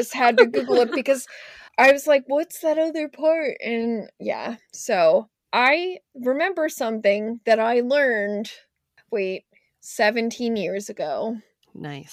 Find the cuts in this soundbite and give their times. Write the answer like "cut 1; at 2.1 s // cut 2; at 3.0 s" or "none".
cut 1; at 1.7 s

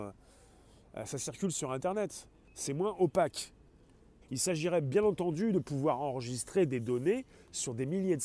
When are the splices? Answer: cut 1; at 2.5 s // cut 2; at 4.2 s

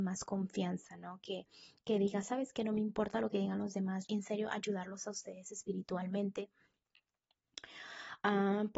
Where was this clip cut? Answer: cut 1; at 4.1 s

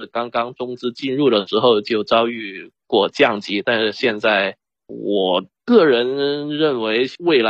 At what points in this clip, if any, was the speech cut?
cut 1; at 4.8 s

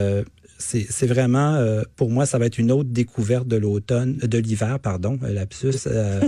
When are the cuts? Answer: none

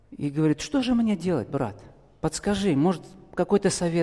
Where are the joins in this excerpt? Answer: none

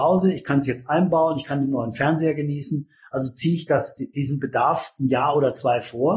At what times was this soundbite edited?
none

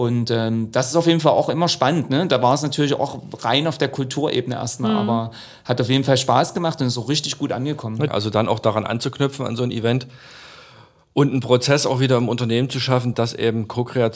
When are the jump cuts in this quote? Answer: cut 1; at 8.1 s // cut 2; at 13.1 s

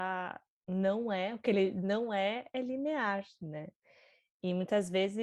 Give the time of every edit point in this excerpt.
none

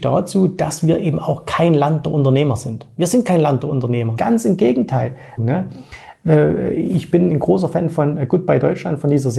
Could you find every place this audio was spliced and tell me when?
cut 1; at 4.2 s // cut 2; at 5.4 s

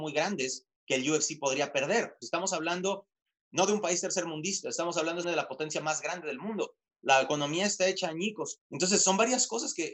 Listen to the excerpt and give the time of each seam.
cut 1; at 2.2 s // cut 2; at 5.2 s // cut 3; at 8.6 s

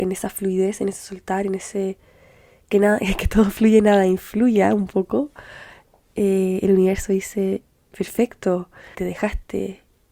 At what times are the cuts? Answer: cut 1; at 8.9 s

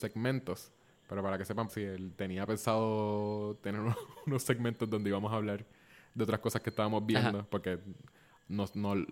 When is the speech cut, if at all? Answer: cut 1; at 1.7 s

